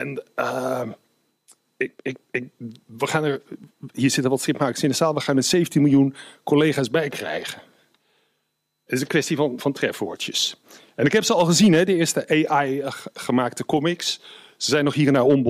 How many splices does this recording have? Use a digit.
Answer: 0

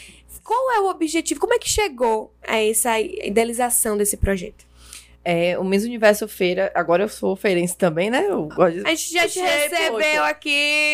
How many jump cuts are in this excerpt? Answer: 0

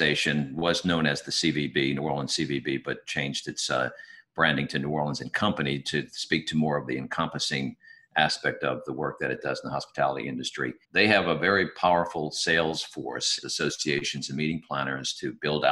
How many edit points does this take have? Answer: 2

